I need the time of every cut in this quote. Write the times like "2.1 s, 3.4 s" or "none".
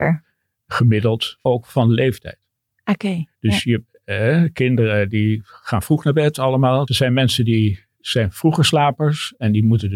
1.5 s, 6.9 s